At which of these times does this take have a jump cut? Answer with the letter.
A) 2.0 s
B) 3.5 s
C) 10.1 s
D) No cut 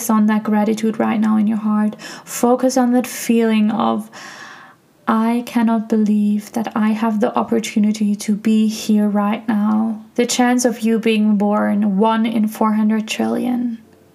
C